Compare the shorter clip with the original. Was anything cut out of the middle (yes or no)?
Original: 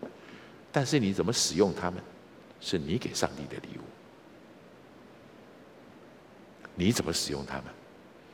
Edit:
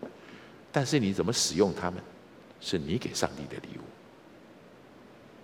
no